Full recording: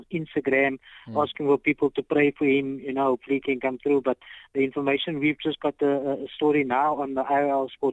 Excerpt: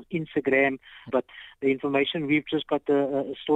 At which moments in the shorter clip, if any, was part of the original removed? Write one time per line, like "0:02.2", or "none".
0:01.1